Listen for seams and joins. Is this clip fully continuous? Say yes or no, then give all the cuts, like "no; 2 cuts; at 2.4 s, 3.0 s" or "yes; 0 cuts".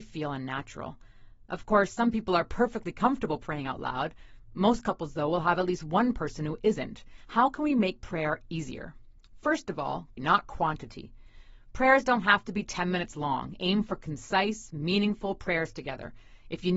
no; 1 cut; at 10.2 s